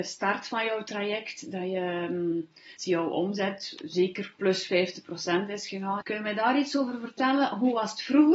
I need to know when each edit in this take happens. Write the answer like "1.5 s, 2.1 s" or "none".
2.8 s, 6.0 s